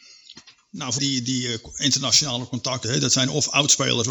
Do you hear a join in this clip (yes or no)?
yes